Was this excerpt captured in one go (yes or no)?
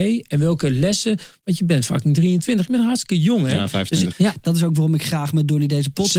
no